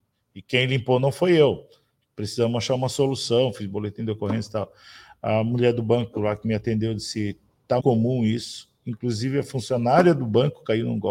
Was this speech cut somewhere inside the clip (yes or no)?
yes